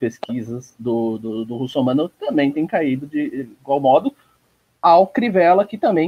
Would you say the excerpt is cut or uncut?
uncut